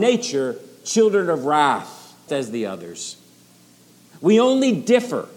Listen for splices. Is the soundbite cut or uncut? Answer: cut